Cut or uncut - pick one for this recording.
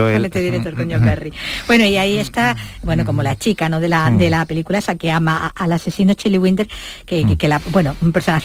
uncut